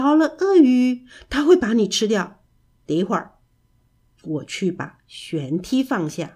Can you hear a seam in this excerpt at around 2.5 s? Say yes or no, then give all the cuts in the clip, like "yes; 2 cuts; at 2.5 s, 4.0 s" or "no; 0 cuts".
no; 0 cuts